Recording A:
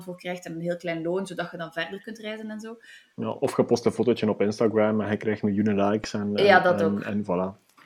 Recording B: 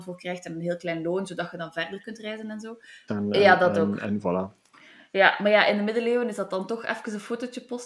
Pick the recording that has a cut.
B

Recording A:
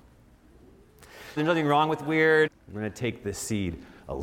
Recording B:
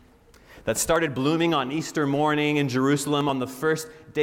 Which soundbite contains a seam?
A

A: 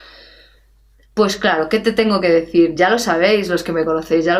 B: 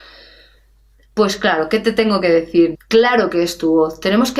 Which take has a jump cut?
B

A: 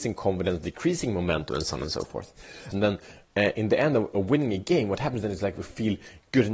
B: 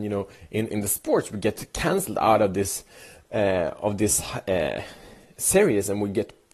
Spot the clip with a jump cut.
A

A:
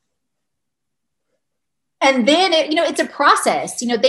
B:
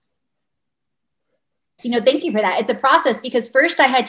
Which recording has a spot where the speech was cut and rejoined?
B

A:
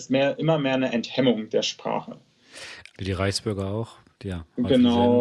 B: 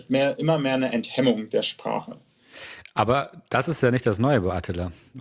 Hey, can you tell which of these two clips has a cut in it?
A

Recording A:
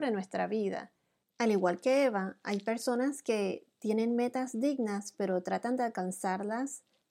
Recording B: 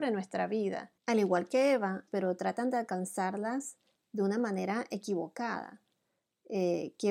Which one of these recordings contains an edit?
B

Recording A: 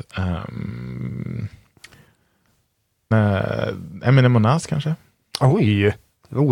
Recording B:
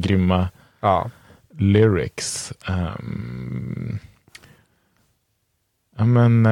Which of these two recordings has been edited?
A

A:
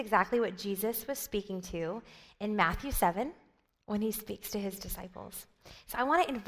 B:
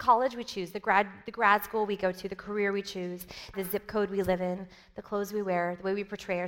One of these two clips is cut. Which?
B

